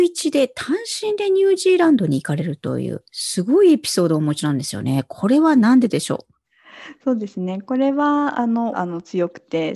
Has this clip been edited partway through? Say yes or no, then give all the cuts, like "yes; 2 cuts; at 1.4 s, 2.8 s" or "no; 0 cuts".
yes; 1 cut; at 8.7 s